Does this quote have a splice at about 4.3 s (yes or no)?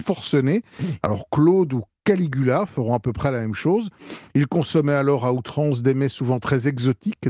no